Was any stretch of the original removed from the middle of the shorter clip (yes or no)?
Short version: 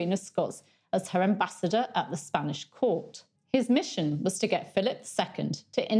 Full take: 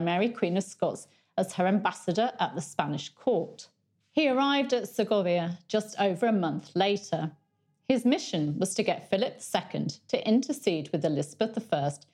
yes